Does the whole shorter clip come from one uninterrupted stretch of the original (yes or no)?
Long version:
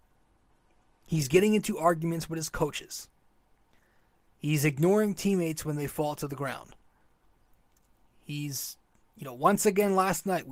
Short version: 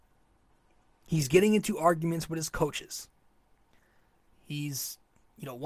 no